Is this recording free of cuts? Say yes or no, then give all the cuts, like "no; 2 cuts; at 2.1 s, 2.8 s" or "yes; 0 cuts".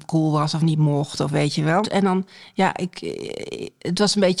no; 1 cut; at 1.8 s